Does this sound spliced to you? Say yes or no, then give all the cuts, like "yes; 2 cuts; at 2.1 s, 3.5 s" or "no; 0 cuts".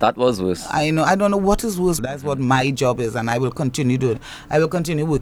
yes; 1 cut; at 2.0 s